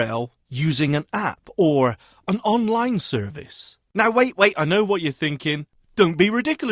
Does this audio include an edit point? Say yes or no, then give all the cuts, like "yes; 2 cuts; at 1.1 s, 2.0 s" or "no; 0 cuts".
no; 0 cuts